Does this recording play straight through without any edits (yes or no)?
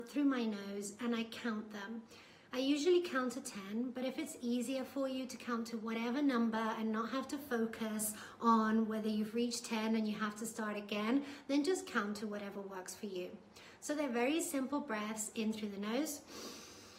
yes